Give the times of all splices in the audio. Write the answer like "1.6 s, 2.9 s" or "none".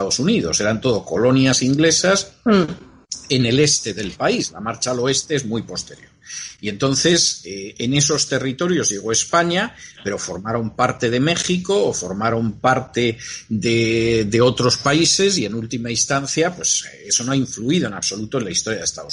none